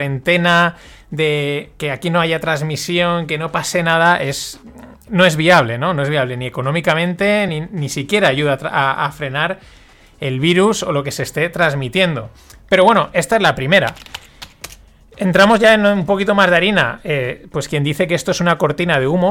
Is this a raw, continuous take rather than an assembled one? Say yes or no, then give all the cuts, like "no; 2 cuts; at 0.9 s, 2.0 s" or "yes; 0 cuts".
no; 1 cut; at 7.5 s